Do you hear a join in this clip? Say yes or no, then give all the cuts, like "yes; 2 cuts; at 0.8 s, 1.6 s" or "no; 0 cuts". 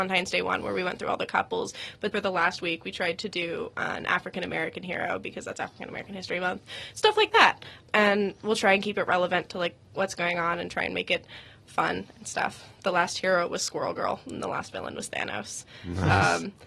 no; 0 cuts